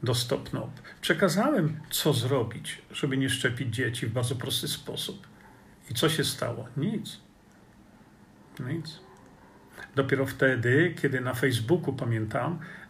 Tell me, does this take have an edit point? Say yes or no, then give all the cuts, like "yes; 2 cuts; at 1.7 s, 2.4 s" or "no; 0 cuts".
no; 0 cuts